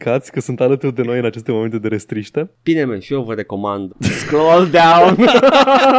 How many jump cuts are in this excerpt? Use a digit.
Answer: 1